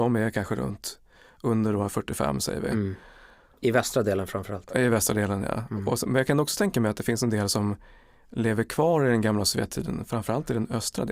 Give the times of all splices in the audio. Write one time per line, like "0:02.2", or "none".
none